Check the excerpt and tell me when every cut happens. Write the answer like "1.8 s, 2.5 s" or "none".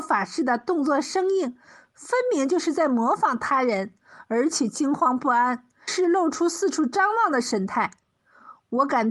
5.9 s